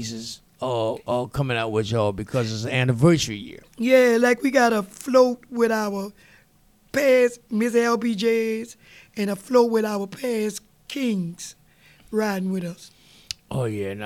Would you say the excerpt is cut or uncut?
uncut